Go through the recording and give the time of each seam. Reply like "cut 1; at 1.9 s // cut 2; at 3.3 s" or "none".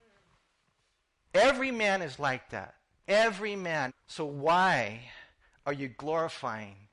cut 1; at 3.9 s